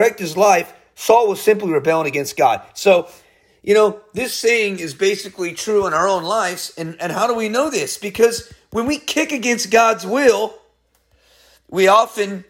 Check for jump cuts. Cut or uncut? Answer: uncut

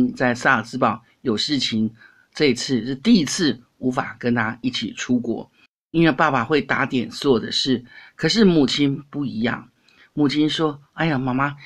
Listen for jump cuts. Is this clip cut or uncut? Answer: uncut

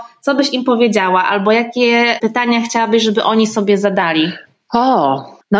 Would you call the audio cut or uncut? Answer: uncut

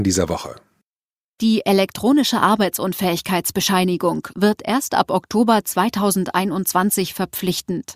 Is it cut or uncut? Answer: cut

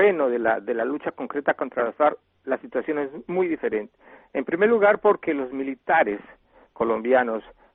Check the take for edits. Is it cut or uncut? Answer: uncut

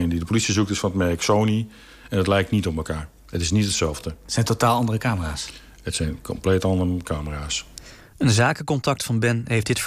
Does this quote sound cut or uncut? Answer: uncut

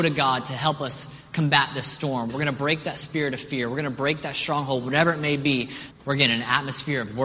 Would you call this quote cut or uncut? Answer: cut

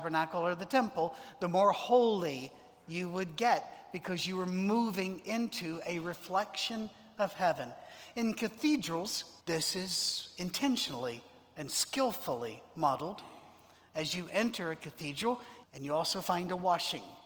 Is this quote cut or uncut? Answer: cut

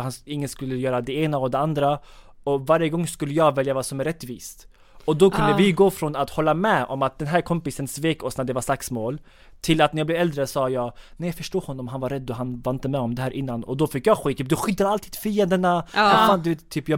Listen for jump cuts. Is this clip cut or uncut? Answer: uncut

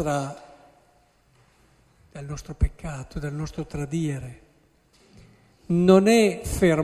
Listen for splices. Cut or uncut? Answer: uncut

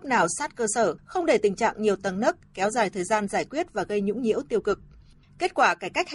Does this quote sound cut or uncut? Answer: cut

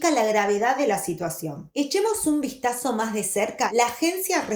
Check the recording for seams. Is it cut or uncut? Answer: uncut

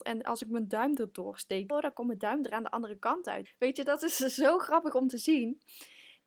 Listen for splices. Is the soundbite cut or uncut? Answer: cut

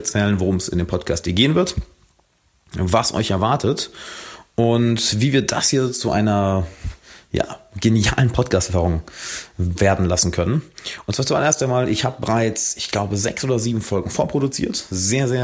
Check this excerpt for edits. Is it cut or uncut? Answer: uncut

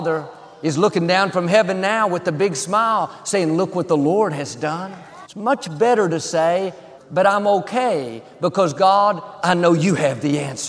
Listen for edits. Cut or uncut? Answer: cut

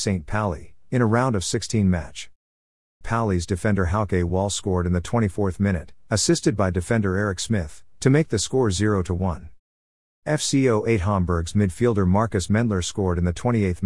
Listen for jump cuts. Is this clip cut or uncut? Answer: cut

